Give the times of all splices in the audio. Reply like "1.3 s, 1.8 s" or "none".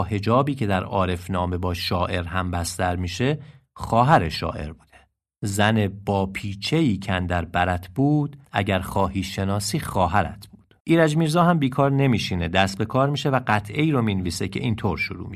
8.5 s, 10.8 s